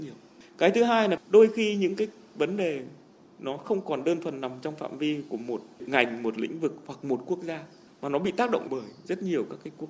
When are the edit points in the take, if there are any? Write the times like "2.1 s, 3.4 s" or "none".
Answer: none